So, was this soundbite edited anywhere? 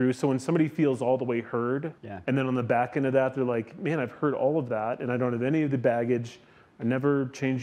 yes; 1 cut; at 2.0 s

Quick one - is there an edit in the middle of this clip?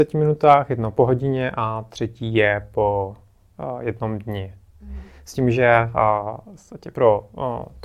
no; 0 cuts

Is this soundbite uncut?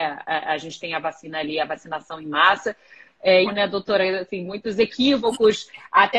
no; 1 cut; at 3.4 s

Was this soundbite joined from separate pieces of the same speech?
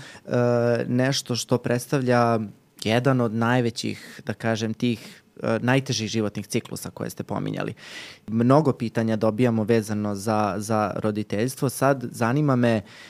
no; 0 cuts

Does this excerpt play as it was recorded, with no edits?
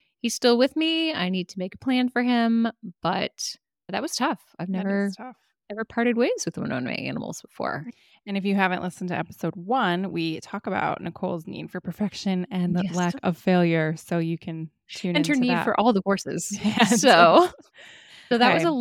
yes; 0 cuts

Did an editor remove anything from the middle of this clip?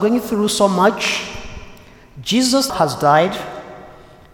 yes; 1 cut; at 2.7 s

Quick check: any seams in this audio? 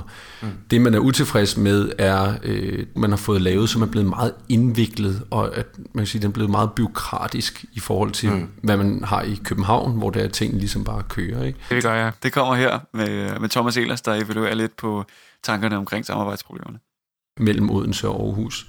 yes; 3 cuts; at 3.0 s, 11.7 s, 17.4 s

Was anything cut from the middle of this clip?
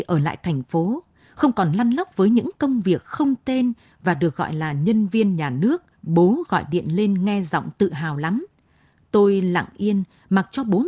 yes; 1 cut; at 5.9 s

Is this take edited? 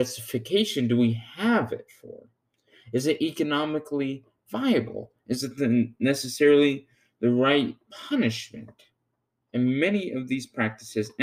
yes; 1 cut; at 9.4 s

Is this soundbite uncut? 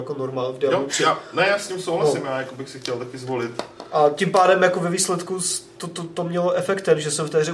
yes; 0 cuts

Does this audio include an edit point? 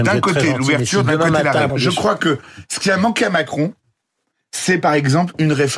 yes; 1 cut; at 1.7 s

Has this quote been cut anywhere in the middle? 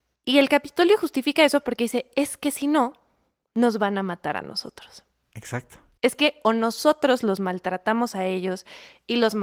no; 0 cuts

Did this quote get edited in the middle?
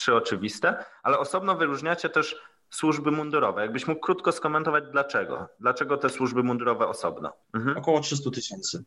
yes; 1 cut; at 7.4 s

